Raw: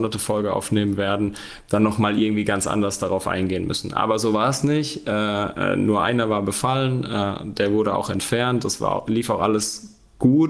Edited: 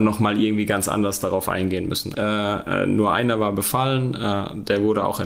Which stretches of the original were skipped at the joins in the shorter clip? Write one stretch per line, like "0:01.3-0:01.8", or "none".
0:03.9-0:05.0